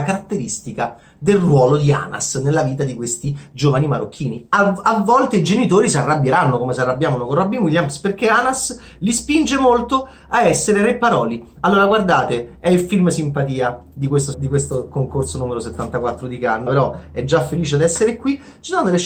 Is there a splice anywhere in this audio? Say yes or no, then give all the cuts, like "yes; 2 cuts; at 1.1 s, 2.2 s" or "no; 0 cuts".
yes; 2 cuts; at 14.3 s, 16.7 s